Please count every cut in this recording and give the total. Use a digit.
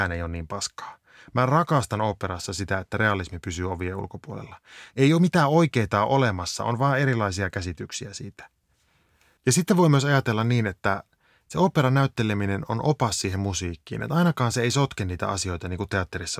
1